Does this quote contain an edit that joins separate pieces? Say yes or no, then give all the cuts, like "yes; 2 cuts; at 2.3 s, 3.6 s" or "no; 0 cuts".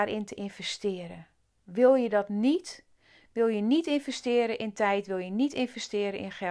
no; 0 cuts